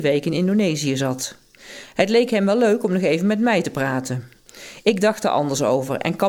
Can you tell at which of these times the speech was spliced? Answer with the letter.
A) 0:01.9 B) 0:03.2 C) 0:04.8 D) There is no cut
D